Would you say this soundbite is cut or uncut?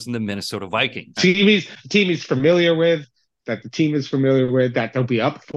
cut